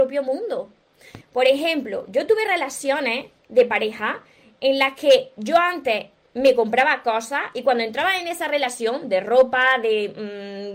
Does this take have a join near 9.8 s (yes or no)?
no